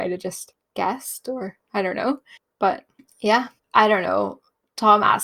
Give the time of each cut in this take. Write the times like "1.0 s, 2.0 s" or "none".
3.6 s